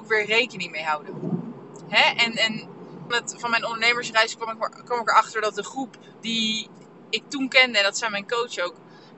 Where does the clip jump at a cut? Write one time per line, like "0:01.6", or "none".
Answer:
0:03.1